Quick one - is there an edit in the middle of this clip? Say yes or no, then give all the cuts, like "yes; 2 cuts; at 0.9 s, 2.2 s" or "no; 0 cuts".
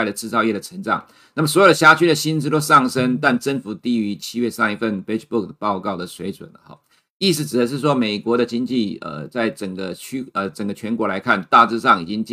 no; 0 cuts